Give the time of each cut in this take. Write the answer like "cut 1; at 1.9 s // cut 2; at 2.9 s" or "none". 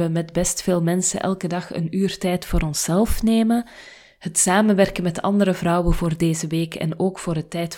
none